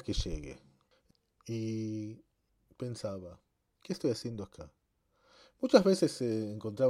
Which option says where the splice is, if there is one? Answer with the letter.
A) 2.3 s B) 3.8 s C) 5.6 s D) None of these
D